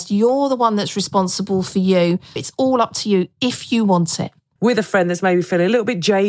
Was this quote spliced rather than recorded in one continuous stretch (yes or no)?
yes